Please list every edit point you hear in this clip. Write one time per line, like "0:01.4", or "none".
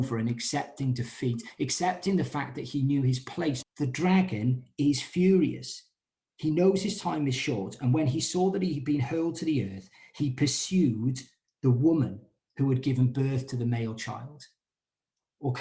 0:03.6